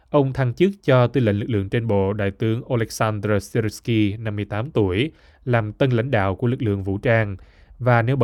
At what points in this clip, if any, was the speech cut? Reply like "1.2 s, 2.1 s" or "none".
none